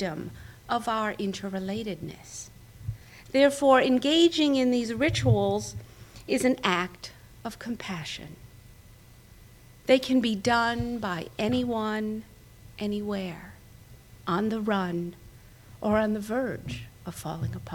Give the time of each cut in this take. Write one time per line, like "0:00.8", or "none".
0:12.7